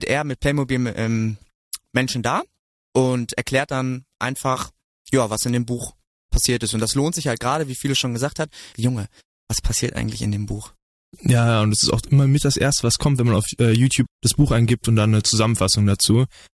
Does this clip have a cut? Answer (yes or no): yes